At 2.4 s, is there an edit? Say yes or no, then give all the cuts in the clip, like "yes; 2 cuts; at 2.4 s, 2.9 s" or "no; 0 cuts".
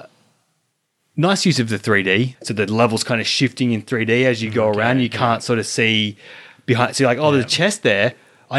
yes; 1 cut; at 2.4 s